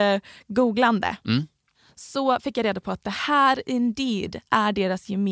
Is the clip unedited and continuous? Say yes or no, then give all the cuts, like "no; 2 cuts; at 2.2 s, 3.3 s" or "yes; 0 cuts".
yes; 0 cuts